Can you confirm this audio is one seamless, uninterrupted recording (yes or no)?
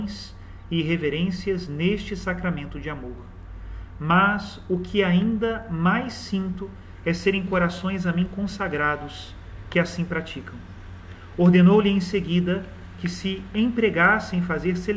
yes